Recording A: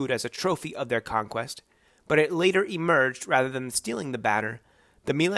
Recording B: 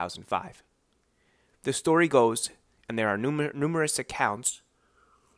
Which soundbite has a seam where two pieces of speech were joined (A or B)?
B